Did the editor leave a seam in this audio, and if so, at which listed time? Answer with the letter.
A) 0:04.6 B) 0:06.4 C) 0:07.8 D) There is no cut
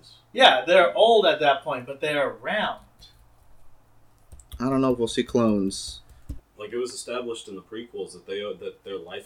B